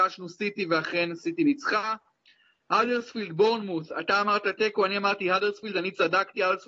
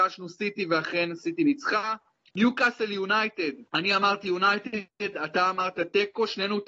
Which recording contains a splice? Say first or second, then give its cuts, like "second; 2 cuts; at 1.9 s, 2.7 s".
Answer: second; 2 cuts; at 2.3 s, 3.7 s